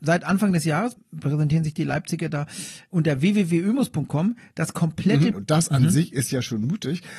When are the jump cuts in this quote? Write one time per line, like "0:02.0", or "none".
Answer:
0:05.3